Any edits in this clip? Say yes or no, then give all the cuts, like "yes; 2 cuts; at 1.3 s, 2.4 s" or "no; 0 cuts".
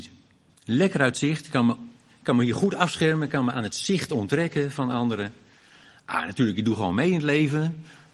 no; 0 cuts